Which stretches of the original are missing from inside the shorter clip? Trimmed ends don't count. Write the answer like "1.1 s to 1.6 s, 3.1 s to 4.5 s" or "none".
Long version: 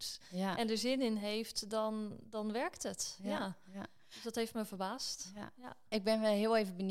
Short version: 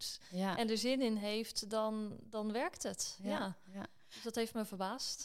none

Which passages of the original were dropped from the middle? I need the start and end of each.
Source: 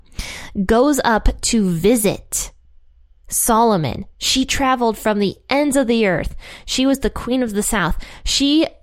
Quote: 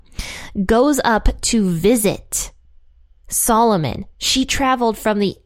none

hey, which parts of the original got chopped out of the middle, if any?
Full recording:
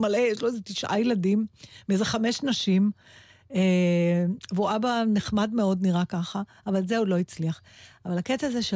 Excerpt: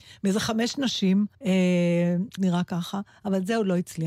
3.0 s to 3.4 s, 4.5 s to 5.8 s

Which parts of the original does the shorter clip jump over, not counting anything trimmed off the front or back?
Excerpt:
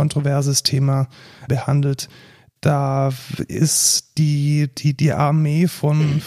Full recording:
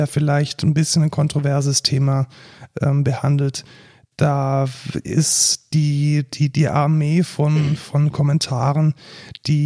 2.7 s to 3.0 s

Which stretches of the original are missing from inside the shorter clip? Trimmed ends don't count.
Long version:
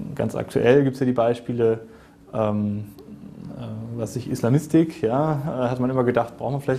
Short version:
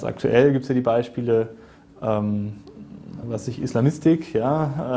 3.5 s to 3.9 s

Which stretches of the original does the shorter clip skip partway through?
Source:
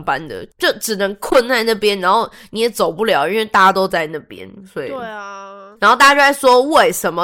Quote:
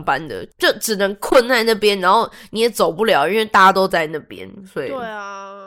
none

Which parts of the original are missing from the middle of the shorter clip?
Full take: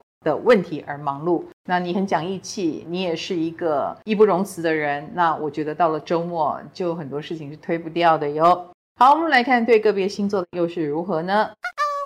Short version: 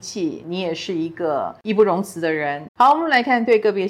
5.1 s to 8.9 s

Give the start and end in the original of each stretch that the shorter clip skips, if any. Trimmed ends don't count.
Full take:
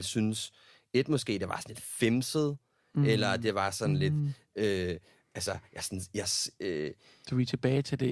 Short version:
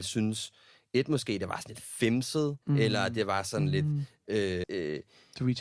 2.6 s to 2.9 s, 4.9 s to 6.5 s

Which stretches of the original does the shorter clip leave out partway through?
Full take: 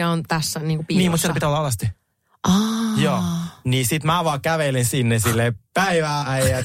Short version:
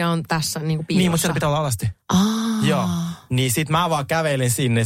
2.0 s to 2.4 s

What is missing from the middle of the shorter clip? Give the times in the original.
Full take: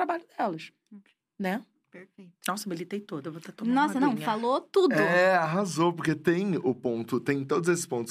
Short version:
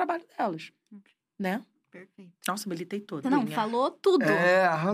3.2 s to 3.9 s

